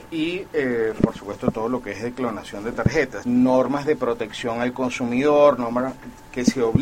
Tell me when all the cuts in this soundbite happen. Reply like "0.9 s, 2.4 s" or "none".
3.2 s